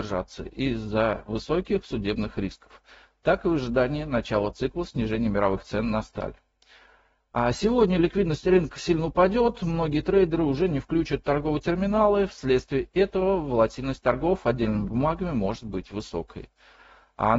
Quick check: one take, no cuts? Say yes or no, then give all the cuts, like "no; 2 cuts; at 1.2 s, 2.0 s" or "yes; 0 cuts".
yes; 0 cuts